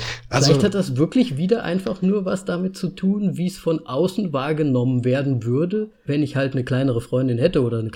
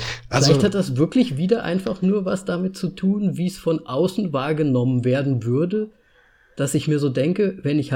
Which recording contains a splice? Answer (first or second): first